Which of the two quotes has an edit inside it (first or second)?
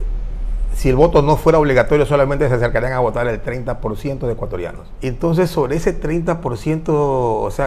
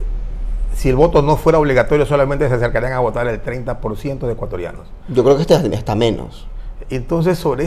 first